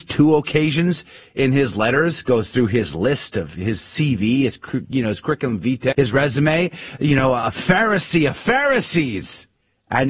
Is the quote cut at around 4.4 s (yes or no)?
no